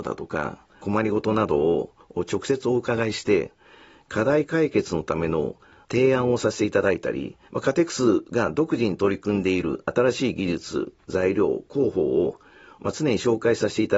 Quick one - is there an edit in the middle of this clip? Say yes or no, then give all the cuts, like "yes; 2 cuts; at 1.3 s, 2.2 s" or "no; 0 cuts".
yes; 1 cut; at 7.5 s